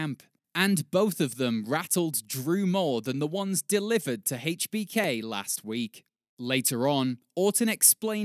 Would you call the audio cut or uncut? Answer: uncut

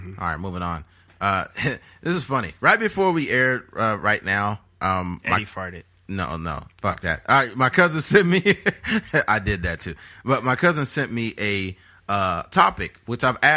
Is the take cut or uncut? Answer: uncut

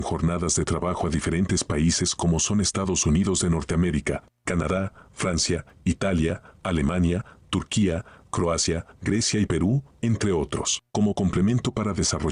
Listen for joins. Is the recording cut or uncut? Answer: cut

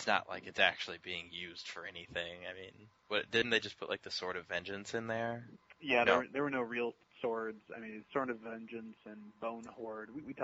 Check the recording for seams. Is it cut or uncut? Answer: uncut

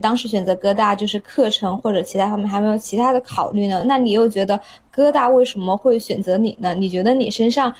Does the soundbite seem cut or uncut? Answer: uncut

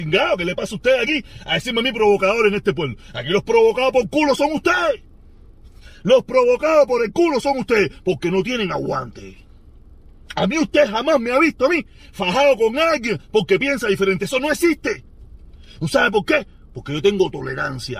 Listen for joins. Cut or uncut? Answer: uncut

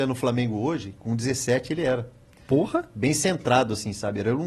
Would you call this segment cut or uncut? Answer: uncut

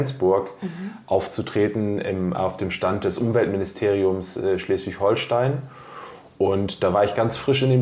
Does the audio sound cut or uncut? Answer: uncut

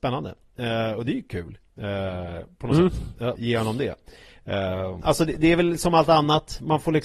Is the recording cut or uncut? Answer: cut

